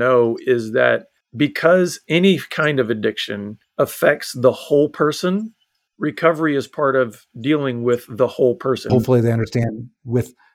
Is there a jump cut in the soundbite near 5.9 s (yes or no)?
no